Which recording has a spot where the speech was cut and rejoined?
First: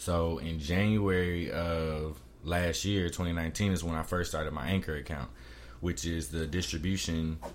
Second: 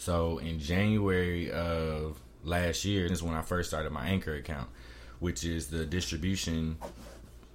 second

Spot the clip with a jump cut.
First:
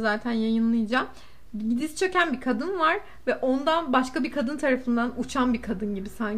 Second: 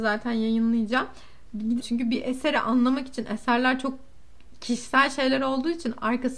second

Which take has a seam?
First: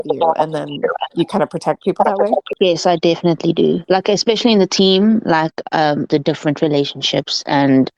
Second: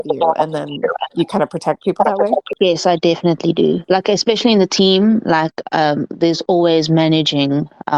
first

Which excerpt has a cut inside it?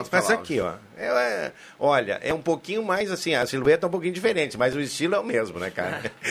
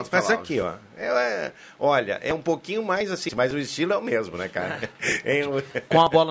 second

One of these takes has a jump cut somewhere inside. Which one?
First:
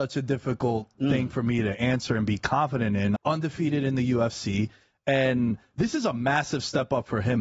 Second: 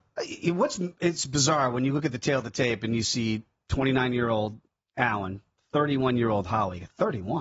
first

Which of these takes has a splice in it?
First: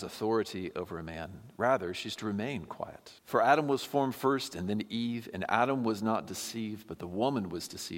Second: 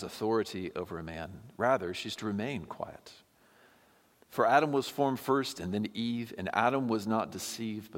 first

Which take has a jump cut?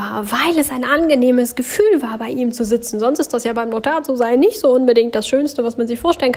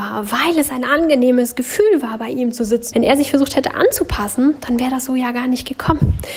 second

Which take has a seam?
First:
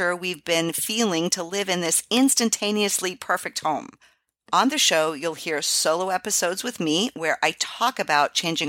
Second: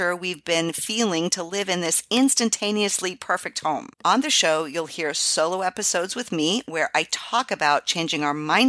second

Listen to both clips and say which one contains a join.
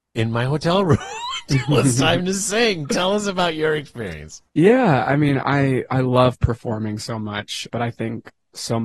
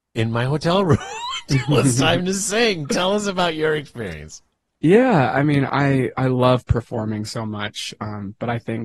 first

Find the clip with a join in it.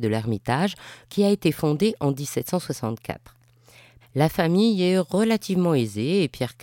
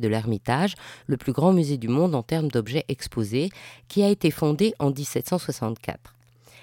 first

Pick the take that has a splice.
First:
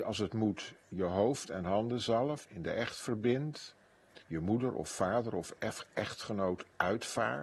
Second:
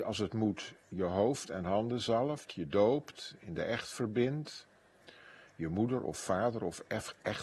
first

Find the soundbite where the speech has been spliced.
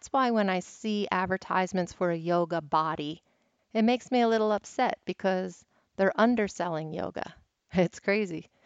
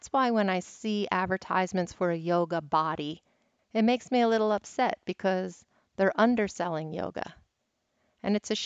first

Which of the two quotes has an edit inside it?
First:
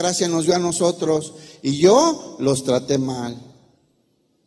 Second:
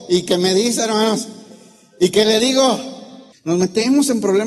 second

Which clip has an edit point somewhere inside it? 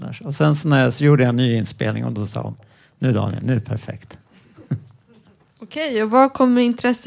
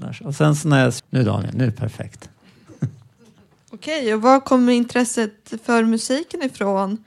second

